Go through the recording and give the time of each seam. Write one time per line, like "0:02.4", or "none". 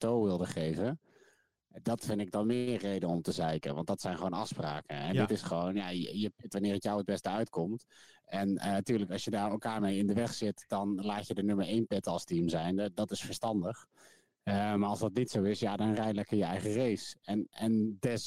none